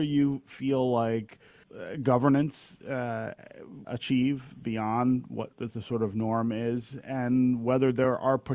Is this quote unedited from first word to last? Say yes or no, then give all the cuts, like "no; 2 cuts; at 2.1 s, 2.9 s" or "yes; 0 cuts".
no; 3 cuts; at 1.6 s, 3.8 s, 5.5 s